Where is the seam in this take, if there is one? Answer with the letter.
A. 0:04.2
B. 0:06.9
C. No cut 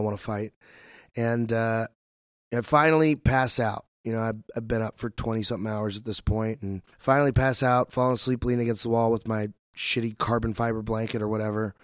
B